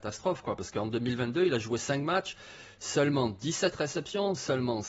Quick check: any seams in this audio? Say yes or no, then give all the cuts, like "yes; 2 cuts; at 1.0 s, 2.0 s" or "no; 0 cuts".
no; 0 cuts